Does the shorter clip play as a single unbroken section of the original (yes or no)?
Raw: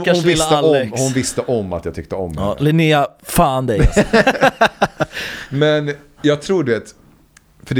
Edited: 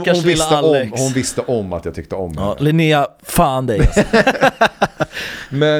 yes